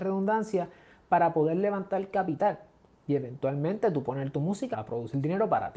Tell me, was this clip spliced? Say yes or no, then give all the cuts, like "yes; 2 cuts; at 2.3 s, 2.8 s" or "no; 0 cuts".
yes; 1 cut; at 4.7 s